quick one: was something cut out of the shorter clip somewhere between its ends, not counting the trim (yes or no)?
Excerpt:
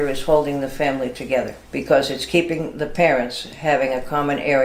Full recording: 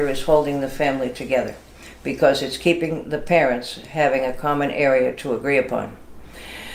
yes